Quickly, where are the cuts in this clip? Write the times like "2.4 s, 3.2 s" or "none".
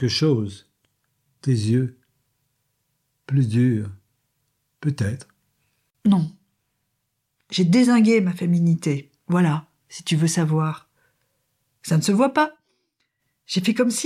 none

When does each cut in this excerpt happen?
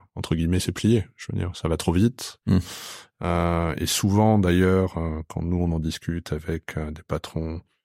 none

